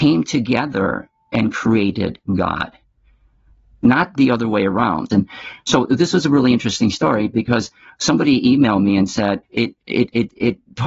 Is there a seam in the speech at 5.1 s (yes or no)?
yes